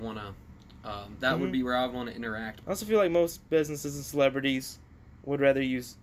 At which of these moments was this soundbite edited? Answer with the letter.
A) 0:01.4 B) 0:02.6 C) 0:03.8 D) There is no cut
B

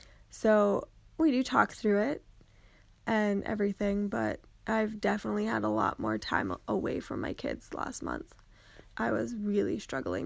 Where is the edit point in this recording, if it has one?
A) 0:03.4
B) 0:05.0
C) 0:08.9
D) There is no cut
C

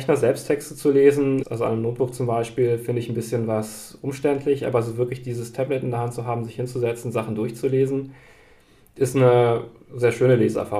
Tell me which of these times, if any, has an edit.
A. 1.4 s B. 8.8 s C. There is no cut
A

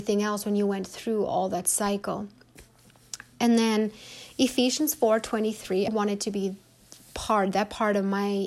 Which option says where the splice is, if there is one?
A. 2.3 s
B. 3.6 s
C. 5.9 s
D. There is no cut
C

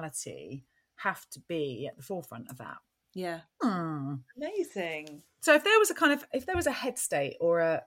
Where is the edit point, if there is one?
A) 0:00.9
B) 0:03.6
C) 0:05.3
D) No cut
B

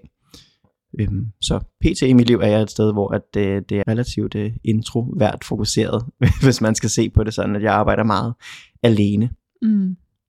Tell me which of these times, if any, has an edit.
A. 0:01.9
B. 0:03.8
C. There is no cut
B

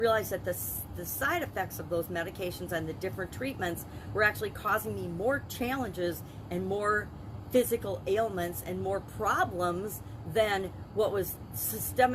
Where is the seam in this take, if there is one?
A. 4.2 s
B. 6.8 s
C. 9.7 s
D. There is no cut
D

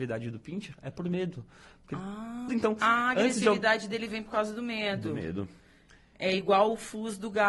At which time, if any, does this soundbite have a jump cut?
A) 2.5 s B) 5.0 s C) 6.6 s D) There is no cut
A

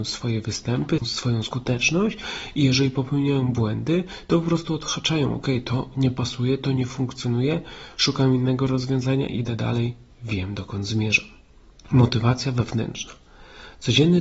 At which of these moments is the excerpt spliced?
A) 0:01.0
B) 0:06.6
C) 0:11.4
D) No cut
D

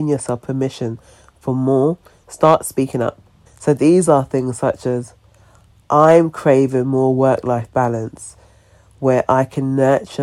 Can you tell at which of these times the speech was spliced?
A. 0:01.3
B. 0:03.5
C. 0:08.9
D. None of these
B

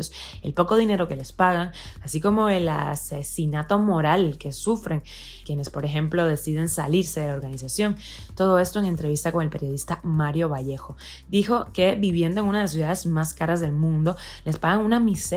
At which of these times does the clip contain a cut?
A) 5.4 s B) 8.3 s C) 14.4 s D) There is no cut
A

